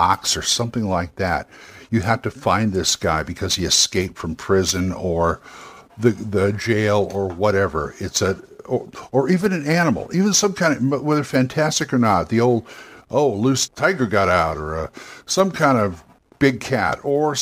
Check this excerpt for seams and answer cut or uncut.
cut